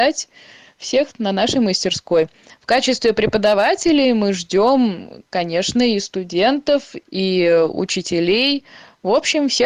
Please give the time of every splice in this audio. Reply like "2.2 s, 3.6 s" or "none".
7.0 s